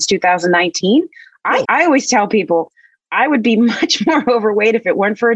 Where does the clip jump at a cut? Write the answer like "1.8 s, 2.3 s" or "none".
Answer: 1.6 s